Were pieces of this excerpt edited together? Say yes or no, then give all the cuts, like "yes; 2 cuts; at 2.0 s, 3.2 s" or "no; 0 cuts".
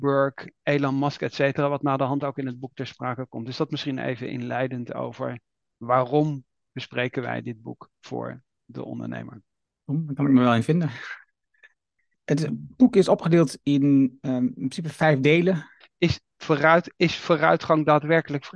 yes; 2 cuts; at 9.8 s, 15.8 s